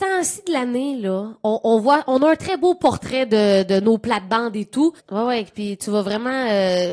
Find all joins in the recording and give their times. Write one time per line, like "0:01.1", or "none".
0:05.0